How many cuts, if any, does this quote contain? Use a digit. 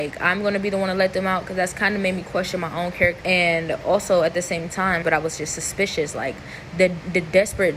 2